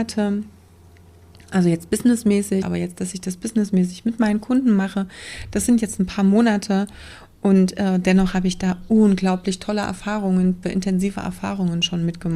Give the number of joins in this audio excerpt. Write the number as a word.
two